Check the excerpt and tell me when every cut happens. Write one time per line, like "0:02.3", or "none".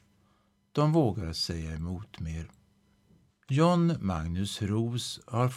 0:03.3